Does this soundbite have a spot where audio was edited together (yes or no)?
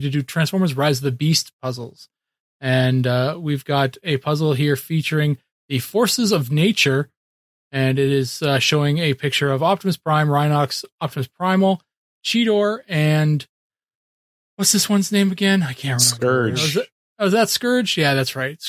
no